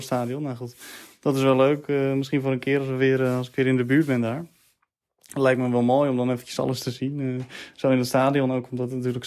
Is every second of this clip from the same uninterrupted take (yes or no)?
yes